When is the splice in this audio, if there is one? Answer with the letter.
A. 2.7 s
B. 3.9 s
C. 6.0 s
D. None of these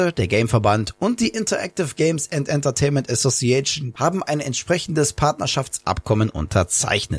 B